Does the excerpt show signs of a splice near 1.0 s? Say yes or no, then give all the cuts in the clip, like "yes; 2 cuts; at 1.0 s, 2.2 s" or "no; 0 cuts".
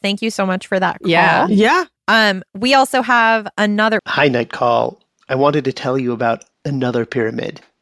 no; 2 cuts; at 4.0 s, 5.2 s